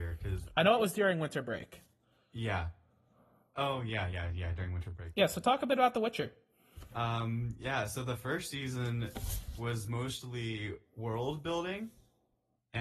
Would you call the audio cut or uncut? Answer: uncut